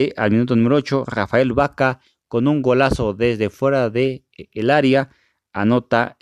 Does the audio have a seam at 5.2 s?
no; 0 cuts

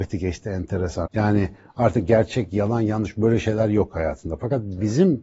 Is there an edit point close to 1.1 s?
yes; 1 cut; at 1.1 s

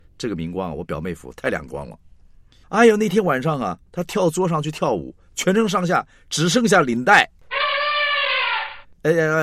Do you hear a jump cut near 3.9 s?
no; 1 cut; at 2.6 s

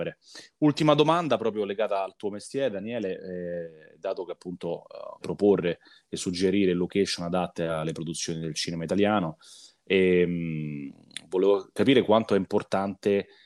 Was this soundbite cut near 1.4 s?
no; 1 cut; at 5.2 s

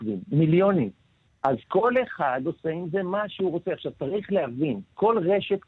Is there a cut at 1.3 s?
yes; 1 cut; at 1.3 s

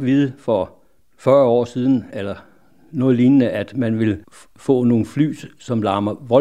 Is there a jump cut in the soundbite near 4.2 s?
yes; 1 cut; at 4.2 s

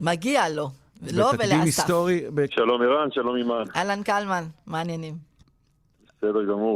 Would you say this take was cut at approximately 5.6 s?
no; 1 cut; at 2.5 s

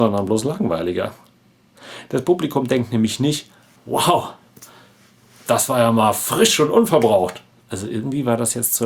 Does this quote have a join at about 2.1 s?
no; 2 cuts; at 3.8 s, 7.6 s

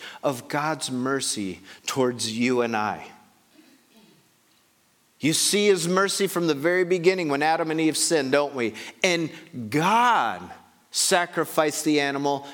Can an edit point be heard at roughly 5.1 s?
no; 0 cuts

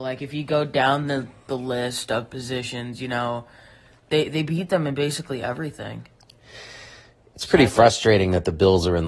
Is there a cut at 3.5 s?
no; 0 cuts

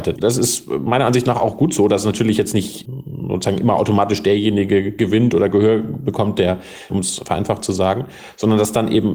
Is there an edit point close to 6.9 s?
yes; 1 cut; at 6.9 s

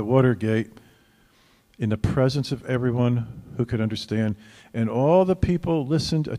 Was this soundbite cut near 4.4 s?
no; 0 cuts

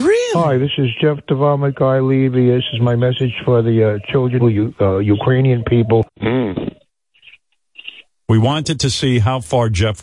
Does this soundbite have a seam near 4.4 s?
yes; 2 cuts; at 4.4 s, 6.1 s

